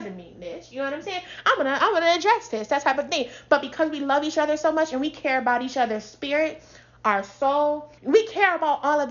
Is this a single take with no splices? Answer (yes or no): no